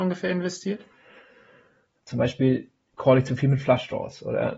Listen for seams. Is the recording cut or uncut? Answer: cut